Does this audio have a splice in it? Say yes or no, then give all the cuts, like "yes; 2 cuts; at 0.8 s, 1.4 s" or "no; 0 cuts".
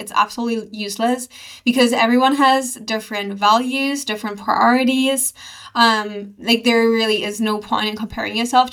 no; 0 cuts